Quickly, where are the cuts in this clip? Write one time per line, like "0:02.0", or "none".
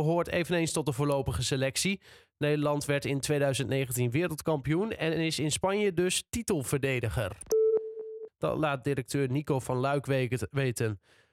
0:08.3